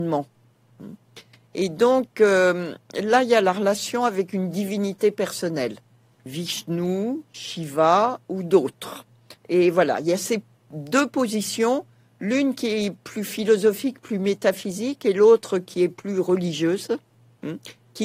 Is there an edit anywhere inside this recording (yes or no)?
yes